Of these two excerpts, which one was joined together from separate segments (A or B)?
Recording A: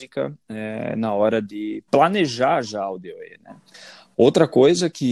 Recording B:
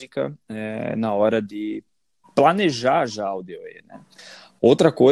A